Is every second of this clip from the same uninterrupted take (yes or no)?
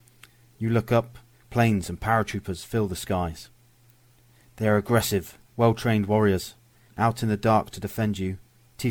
no